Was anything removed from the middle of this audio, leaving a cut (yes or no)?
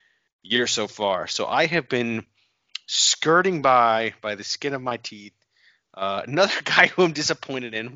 no